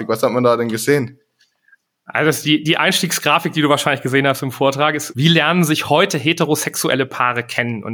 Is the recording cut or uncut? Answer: cut